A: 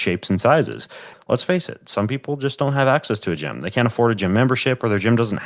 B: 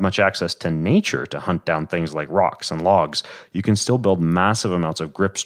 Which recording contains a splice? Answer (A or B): A